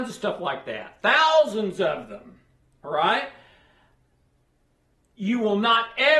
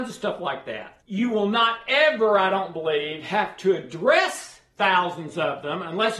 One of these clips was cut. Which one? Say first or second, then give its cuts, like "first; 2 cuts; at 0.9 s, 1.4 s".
second; 1 cut; at 1.0 s